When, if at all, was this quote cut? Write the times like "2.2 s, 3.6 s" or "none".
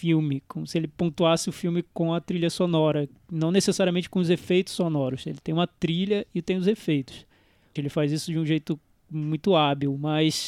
7.8 s

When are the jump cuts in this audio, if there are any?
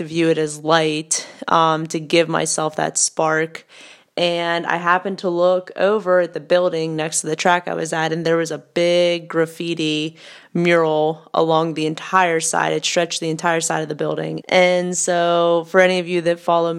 14.4 s

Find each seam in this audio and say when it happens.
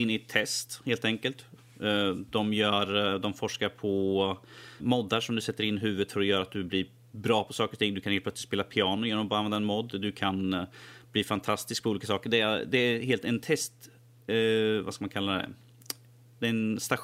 4.8 s

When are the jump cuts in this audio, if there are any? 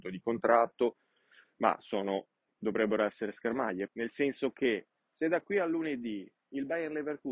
3.9 s

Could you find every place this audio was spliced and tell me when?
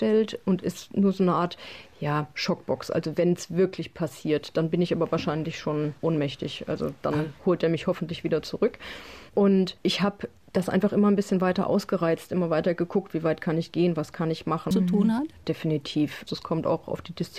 14.7 s, 16.2 s

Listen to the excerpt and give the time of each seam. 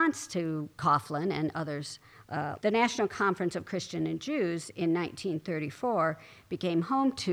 2.6 s

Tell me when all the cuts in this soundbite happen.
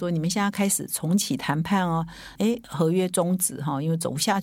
2.4 s

